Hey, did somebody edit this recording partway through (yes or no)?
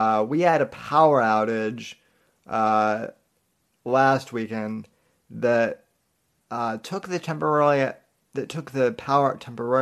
no